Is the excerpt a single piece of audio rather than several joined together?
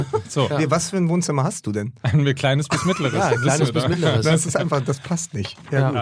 yes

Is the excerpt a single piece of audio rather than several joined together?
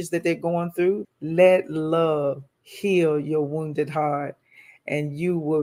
no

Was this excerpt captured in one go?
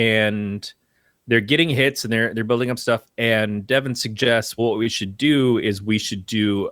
no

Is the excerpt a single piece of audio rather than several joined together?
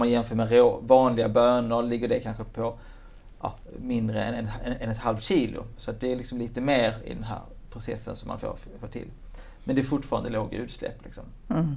yes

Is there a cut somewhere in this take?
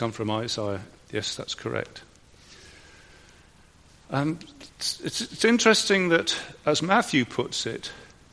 no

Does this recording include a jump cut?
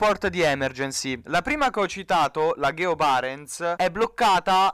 yes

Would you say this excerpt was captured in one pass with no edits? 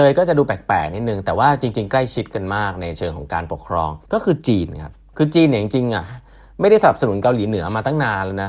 no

